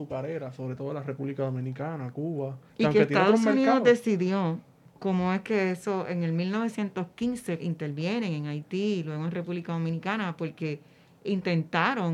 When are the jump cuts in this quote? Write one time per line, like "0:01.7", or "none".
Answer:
0:02.7
0:07.6